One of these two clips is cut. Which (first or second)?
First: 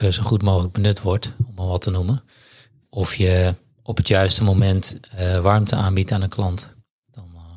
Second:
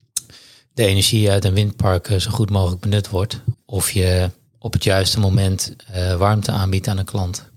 second